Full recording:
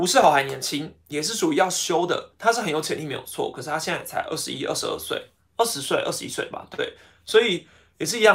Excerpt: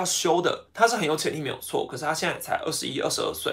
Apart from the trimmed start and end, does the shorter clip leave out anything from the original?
no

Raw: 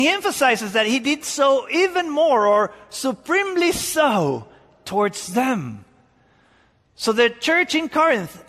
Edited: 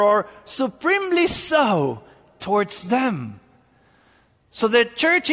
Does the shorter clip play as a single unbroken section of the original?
yes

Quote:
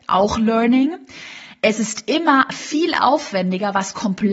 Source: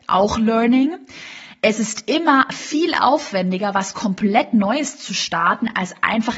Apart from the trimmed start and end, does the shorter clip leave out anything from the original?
no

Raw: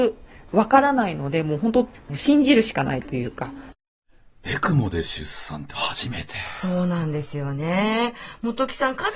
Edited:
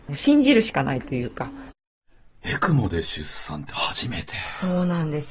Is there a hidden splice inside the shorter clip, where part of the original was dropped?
no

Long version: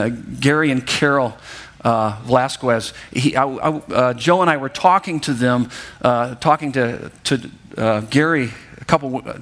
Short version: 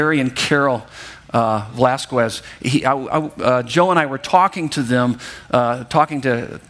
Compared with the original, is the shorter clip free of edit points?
yes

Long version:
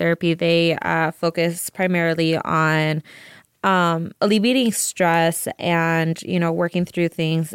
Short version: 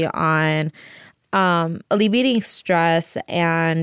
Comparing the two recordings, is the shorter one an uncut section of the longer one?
yes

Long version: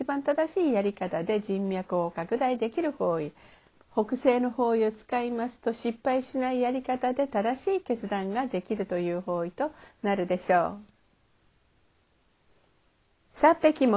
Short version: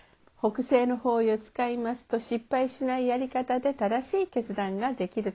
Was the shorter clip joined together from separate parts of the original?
no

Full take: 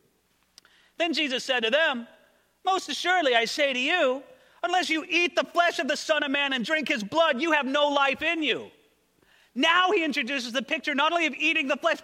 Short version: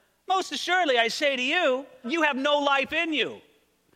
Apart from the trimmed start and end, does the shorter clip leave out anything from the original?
yes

